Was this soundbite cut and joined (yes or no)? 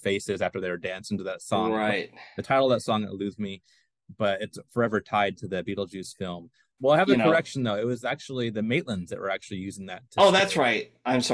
yes